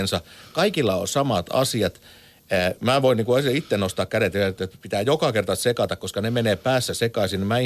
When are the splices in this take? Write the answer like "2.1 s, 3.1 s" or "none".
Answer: none